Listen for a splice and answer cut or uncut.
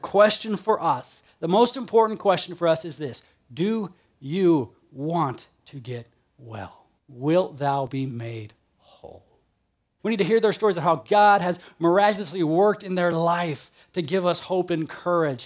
cut